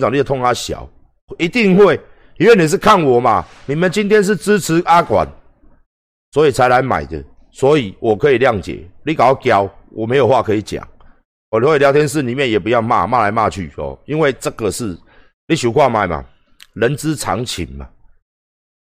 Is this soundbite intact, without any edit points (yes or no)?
yes